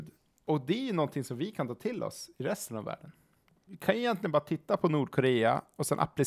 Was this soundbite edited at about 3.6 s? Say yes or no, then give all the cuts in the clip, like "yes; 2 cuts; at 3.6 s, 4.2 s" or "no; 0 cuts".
no; 0 cuts